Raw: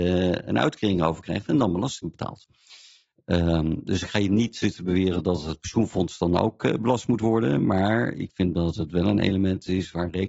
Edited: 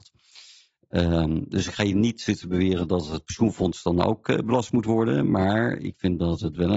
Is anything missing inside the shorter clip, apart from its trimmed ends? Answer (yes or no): no